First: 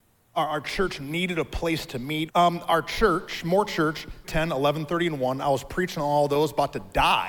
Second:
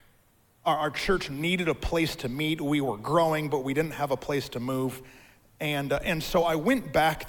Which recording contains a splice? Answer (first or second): first